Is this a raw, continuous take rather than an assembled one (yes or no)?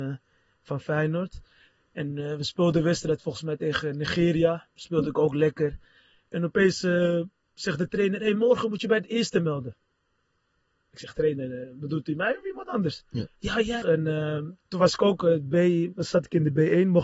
no